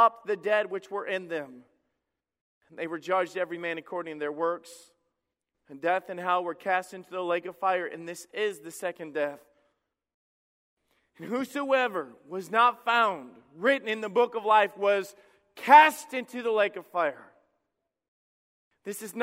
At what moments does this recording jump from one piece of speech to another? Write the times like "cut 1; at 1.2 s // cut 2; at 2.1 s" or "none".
none

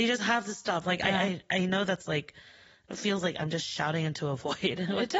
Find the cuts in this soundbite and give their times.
none

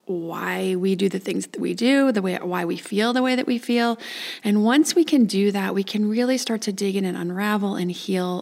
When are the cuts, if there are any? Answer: none

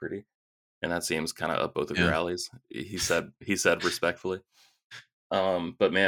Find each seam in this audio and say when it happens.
none

